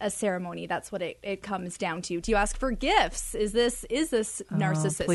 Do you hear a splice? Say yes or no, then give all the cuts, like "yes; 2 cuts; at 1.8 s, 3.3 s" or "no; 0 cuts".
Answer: yes; 1 cut; at 2.2 s